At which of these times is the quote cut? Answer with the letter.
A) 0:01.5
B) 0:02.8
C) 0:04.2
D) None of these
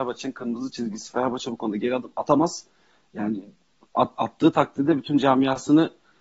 C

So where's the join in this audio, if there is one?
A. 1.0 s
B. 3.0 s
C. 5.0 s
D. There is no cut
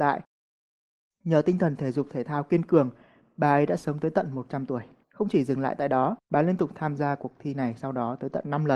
C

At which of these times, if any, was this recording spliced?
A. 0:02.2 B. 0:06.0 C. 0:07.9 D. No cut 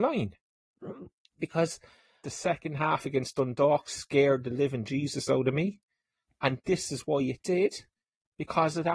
A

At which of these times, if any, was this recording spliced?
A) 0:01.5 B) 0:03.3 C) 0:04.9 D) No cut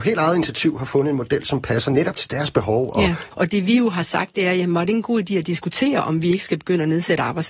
B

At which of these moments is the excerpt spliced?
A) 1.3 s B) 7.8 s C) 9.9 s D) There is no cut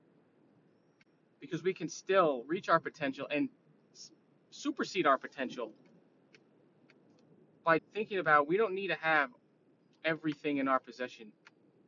B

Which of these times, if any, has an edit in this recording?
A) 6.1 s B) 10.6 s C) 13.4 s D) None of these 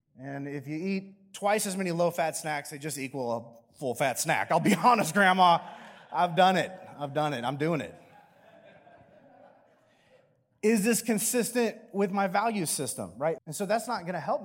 C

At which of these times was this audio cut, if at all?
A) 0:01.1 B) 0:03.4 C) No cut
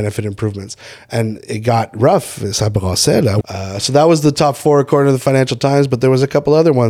B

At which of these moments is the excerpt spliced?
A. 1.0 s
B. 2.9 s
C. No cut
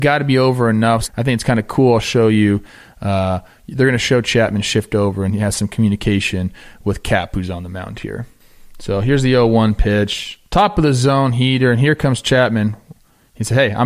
A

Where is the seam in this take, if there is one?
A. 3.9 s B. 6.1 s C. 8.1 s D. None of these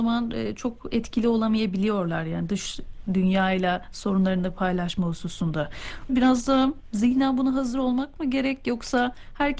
B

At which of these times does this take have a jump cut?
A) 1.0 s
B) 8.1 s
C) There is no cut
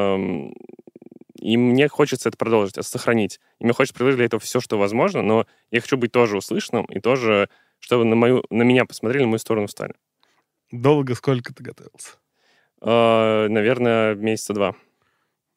C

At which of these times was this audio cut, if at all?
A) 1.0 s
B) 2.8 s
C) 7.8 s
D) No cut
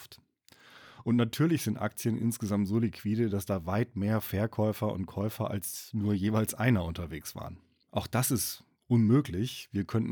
C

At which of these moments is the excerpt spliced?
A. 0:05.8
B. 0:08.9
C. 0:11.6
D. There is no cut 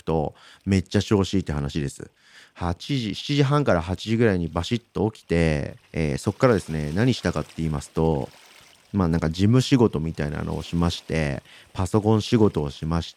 A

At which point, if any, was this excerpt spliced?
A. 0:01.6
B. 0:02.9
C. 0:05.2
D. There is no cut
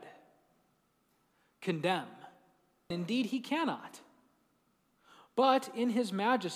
B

